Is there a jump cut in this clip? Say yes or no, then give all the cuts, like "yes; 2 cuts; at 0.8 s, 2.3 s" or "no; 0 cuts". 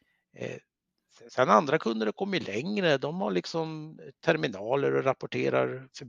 no; 0 cuts